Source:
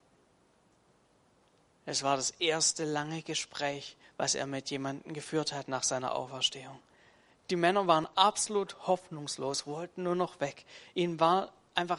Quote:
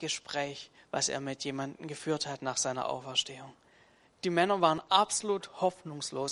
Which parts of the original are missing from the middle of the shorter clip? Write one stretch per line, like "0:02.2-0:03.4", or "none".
none